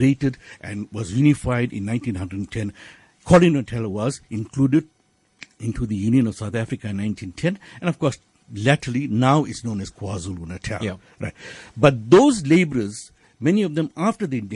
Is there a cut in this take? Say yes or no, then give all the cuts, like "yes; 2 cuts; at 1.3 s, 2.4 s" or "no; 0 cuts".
no; 0 cuts